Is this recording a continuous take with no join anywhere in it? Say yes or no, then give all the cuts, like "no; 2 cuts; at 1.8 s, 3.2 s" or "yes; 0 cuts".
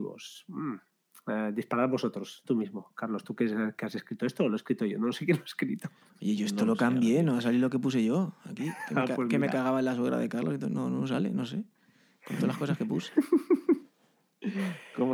no; 1 cut; at 2.4 s